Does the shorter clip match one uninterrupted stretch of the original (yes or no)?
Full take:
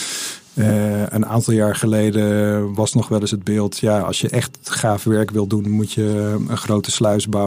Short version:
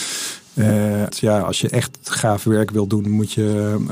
no